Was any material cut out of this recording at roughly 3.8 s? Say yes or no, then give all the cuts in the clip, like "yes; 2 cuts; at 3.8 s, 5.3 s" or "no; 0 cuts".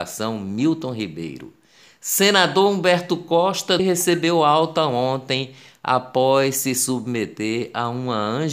yes; 1 cut; at 3.8 s